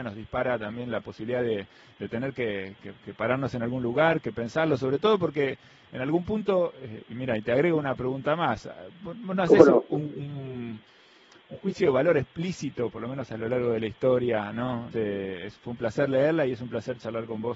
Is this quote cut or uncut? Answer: cut